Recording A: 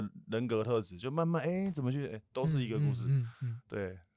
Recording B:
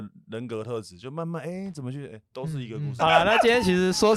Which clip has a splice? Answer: B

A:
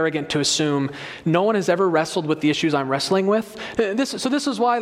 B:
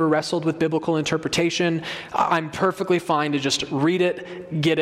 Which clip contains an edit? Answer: A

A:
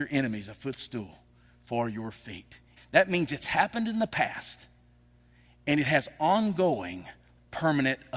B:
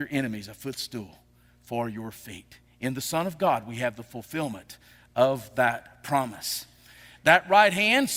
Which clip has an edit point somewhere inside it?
A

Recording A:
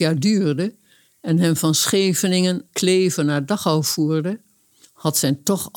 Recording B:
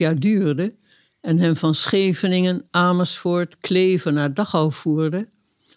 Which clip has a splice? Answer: A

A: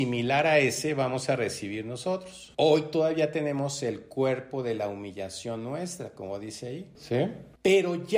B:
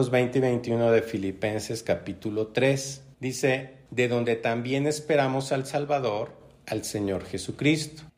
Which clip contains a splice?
B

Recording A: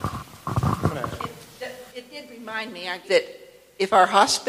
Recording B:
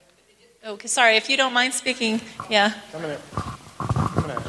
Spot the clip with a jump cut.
A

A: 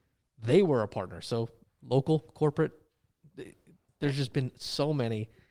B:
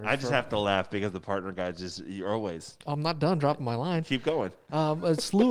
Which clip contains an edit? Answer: A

